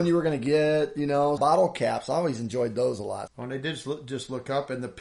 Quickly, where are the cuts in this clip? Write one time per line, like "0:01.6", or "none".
0:01.4
0:03.3